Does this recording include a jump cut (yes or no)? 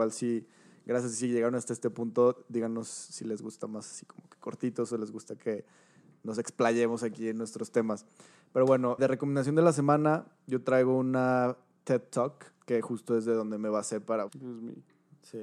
yes